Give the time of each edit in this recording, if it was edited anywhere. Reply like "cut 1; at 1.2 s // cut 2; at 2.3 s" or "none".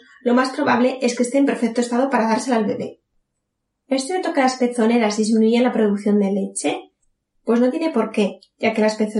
none